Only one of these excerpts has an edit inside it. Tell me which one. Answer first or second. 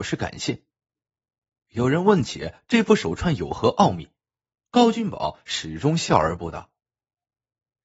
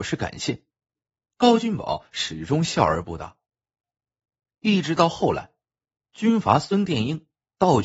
second